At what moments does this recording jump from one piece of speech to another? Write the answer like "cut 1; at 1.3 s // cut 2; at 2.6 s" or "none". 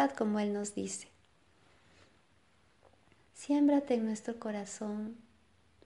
cut 1; at 3.2 s